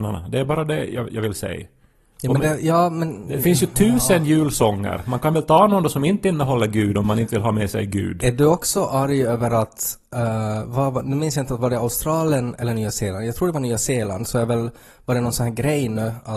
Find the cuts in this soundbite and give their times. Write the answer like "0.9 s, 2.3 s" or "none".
none

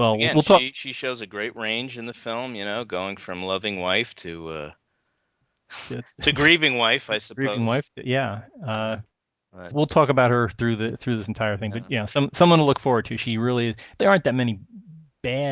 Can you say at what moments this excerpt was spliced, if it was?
9.7 s, 14.0 s

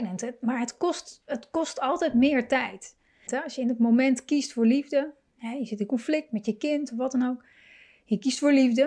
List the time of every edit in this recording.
3.3 s

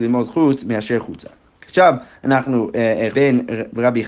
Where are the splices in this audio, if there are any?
1.5 s, 3.1 s

